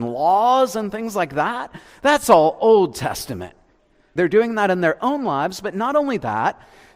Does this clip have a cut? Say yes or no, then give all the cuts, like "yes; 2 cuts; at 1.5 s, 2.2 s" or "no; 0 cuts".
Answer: yes; 1 cut; at 4.2 s